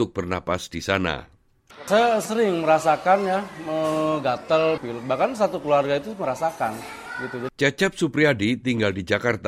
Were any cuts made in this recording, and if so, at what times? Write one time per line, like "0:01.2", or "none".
0:04.8
0:07.5